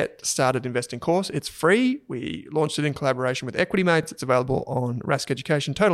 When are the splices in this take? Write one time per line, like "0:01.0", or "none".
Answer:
none

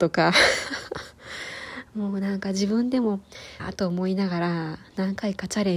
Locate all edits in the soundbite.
0:03.6

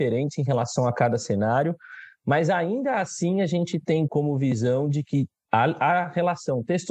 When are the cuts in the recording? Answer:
0:04.1

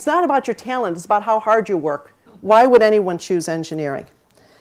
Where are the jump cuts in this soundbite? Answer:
0:02.3

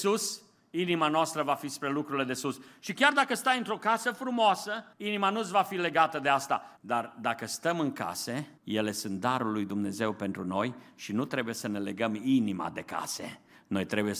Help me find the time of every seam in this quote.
0:04.9
0:06.8
0:08.6

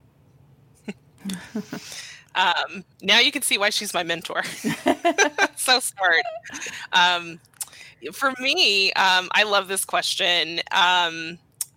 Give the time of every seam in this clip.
0:02.9

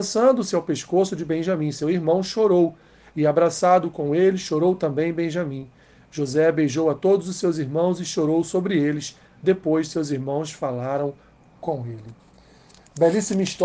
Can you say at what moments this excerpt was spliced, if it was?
none

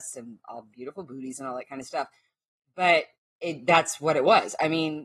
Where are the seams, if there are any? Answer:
none

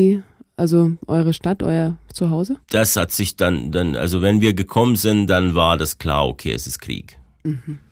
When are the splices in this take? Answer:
0:02.6

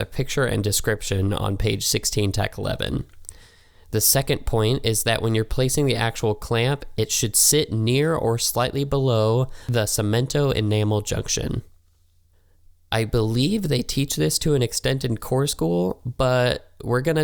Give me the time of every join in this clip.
0:12.9

